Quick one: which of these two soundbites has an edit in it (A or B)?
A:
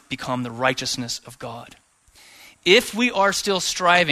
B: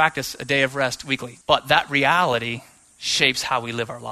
B